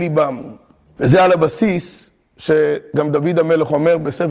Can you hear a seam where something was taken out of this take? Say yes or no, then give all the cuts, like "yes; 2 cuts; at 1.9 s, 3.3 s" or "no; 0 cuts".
yes; 1 cut; at 1.0 s